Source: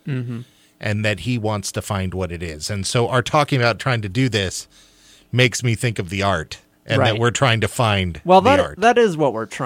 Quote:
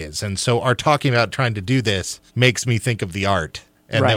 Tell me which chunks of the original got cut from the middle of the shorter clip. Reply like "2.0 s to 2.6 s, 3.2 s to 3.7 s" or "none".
4.7 s to 5.2 s